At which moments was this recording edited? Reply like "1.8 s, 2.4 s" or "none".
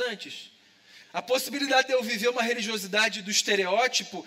1.0 s

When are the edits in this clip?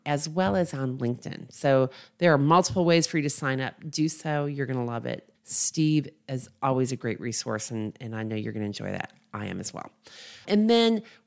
none

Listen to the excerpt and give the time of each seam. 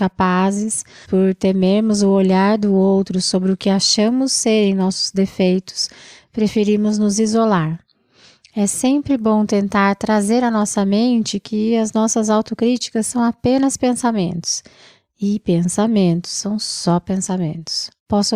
1.0 s

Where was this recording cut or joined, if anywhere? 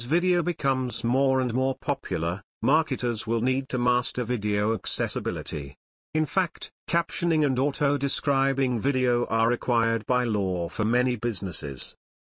none

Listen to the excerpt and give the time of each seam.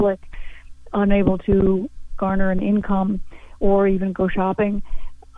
none

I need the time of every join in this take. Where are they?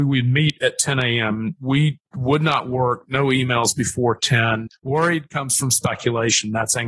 2.1 s, 4.7 s

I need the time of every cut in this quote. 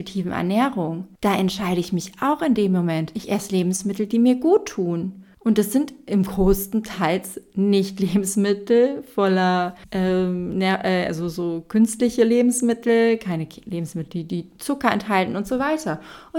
none

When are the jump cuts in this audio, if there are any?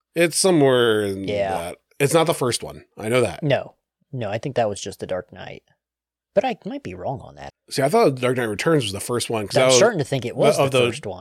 7.5 s

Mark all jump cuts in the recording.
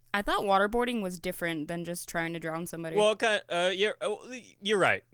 none

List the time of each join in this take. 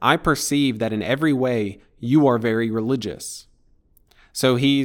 none

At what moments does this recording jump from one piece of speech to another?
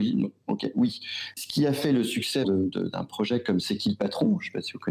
1.3 s, 2.4 s

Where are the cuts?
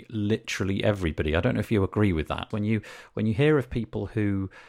2.5 s

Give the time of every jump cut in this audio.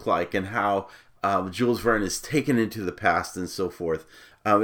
none

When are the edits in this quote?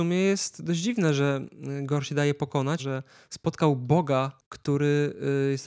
2.8 s

